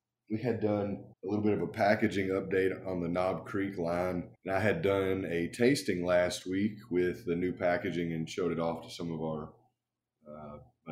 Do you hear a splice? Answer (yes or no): yes